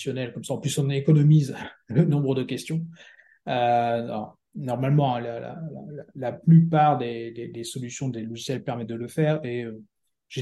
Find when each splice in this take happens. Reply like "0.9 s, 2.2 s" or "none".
none